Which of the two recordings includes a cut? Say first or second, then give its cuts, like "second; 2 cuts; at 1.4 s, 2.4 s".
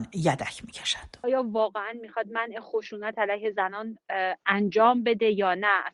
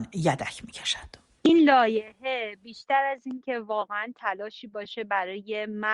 first; 1 cut; at 1.2 s